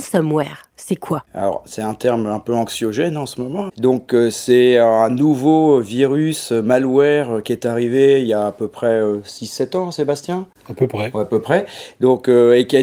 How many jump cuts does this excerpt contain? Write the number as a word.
one